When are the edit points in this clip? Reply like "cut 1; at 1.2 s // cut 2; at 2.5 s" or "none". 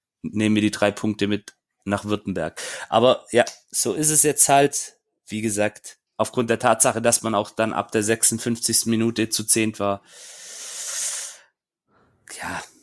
cut 1; at 6.1 s